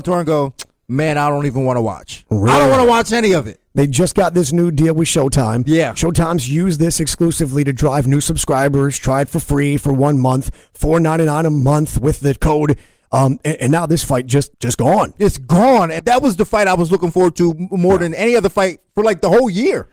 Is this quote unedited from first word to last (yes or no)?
no